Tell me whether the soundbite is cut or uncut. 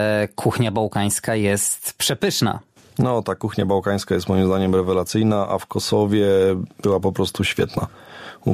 uncut